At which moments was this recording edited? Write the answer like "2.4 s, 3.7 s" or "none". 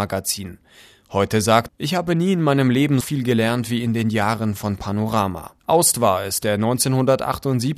1.7 s, 3.0 s, 5.6 s

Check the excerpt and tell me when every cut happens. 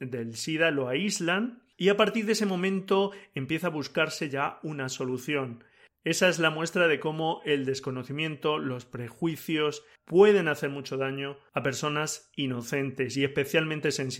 5.9 s, 10.0 s

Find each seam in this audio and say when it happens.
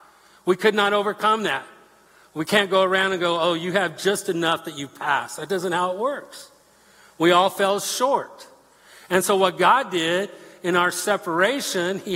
none

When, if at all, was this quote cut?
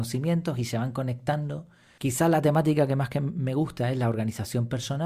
2.0 s

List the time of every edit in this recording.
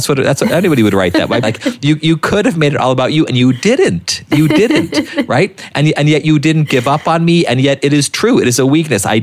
1.4 s

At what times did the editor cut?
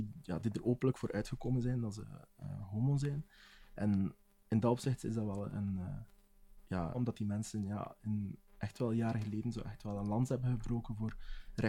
6.9 s, 8.5 s

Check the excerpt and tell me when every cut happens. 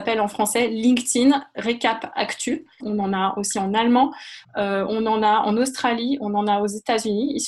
2.8 s, 4.4 s

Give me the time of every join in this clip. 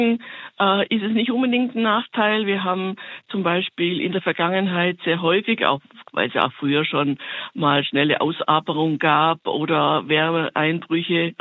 none

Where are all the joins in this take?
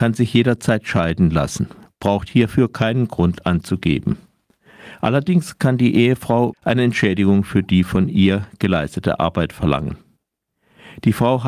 6.5 s

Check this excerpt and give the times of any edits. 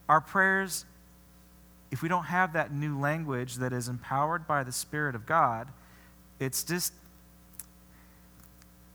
none

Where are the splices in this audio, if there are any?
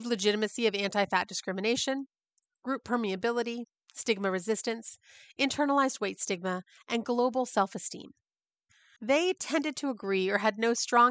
9.0 s

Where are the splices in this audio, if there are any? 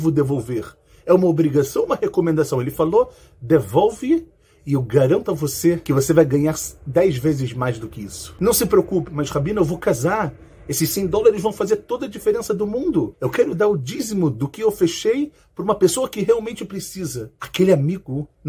13.1 s

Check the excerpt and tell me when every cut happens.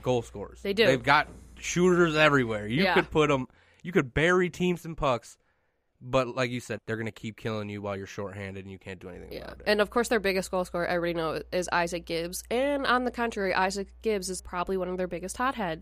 6.8 s, 14.4 s

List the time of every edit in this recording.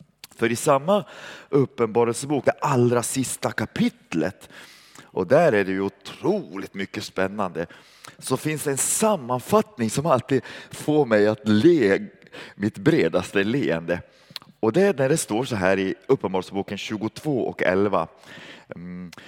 none

